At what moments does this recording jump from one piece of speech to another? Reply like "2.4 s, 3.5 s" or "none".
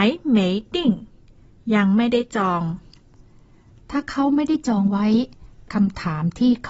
none